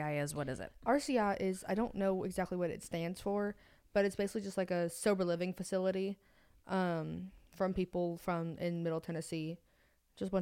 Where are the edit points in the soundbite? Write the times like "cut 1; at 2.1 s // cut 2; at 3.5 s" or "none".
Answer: none